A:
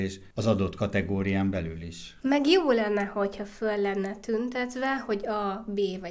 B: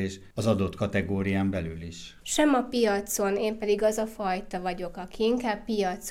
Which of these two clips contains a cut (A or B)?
B